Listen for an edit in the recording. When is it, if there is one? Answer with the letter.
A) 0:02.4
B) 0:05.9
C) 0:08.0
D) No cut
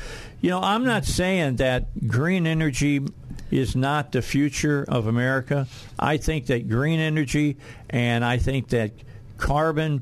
D